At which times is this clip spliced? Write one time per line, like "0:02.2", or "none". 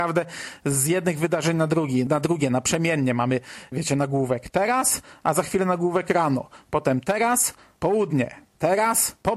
0:02.1
0:03.7